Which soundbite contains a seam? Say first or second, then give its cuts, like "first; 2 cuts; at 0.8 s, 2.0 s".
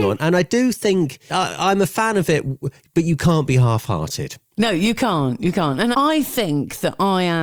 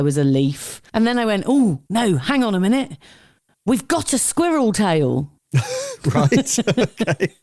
first; 2 cuts; at 1.3 s, 5.9 s